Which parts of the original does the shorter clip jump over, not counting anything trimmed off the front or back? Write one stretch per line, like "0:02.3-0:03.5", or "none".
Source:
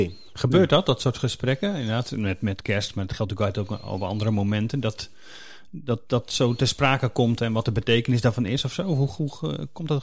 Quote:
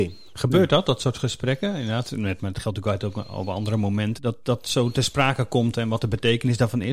0:02.4-0:02.9
0:04.7-0:05.8